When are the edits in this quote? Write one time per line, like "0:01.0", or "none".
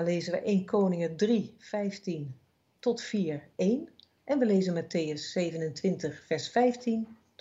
none